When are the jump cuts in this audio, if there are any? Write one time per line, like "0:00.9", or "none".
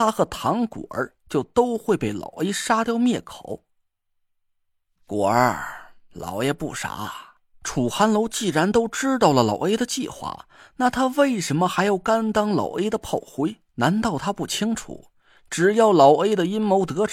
0:07.5
0:13.7